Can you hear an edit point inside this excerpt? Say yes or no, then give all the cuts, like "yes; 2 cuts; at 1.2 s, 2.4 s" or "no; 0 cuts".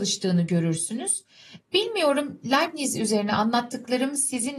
yes; 1 cut; at 1.6 s